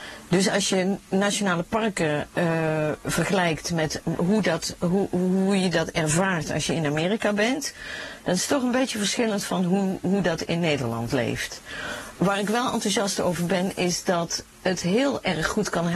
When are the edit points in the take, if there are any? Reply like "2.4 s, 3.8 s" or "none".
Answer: 2.3 s